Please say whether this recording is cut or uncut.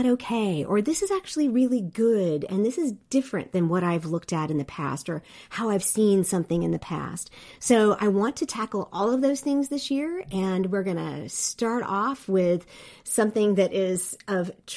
uncut